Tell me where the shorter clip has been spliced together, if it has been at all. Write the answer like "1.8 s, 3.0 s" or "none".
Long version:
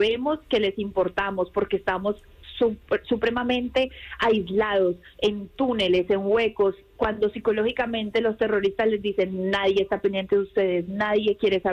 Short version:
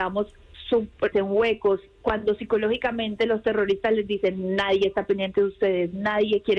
1.1 s